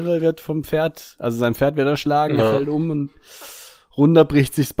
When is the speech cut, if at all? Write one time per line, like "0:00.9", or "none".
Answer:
none